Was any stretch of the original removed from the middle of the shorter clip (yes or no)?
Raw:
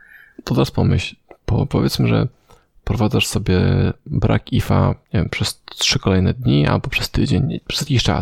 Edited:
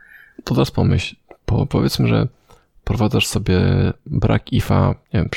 no